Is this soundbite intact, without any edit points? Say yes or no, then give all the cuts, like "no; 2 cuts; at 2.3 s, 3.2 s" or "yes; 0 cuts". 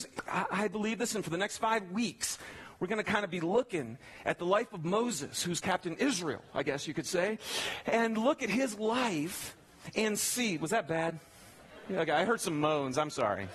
yes; 0 cuts